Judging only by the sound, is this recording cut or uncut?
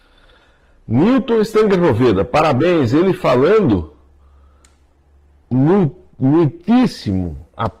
uncut